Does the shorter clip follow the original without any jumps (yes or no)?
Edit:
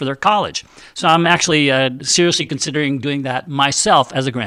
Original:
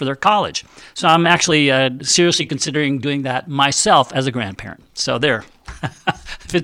yes